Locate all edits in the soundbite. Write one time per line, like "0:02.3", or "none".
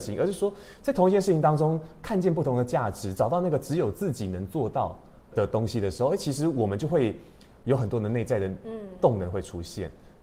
0:05.3